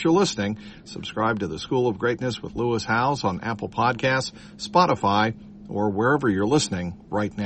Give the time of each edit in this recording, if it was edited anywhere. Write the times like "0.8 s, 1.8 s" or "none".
none